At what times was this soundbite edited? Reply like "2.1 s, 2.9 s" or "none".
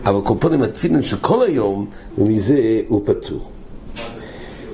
2.1 s